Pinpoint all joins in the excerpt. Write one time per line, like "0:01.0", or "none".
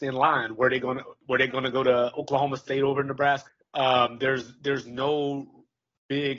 0:03.5